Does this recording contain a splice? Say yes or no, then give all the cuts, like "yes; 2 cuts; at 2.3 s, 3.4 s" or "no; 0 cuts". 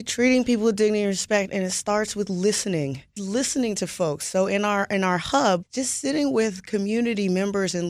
yes; 2 cuts; at 3.2 s, 5.6 s